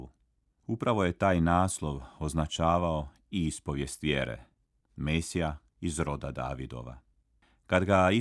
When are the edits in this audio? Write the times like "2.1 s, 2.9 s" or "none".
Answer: 4.8 s